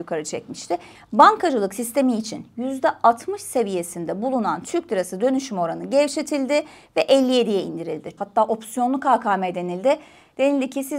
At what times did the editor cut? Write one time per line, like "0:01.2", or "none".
0:01.0
0:08.2